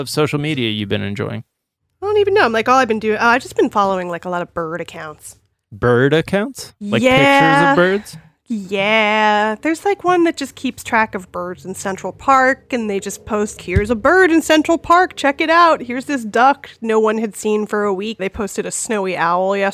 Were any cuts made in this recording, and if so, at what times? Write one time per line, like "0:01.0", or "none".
0:13.6
0:18.2